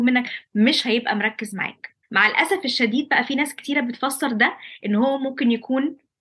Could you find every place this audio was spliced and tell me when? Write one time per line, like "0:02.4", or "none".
0:02.0